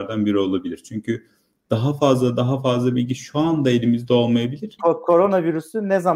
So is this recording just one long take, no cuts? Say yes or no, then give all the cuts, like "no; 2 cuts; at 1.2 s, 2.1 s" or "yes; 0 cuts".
no; 1 cut; at 4.8 s